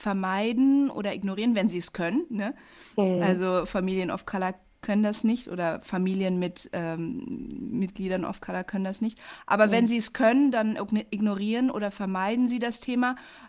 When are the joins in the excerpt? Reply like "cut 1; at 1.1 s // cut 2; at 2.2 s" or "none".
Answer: none